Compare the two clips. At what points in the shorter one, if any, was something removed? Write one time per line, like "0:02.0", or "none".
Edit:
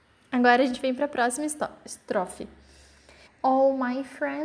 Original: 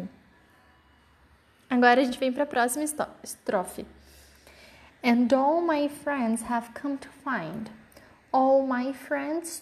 0:03.2